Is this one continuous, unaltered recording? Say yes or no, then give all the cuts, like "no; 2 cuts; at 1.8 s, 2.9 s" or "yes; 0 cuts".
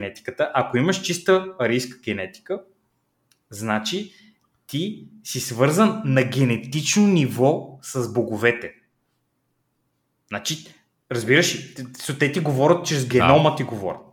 yes; 0 cuts